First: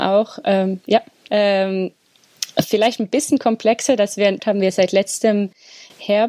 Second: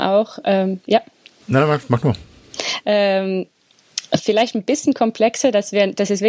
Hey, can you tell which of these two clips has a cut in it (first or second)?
first